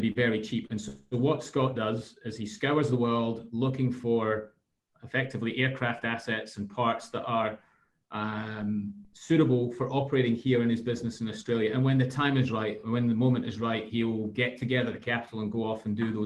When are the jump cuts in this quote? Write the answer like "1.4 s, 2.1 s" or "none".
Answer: none